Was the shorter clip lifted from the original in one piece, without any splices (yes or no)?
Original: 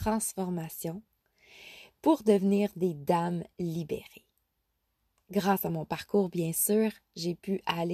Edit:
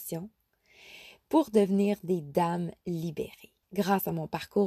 no